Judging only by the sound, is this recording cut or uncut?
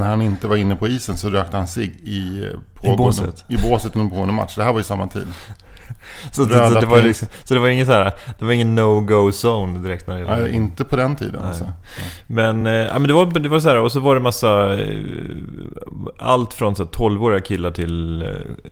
uncut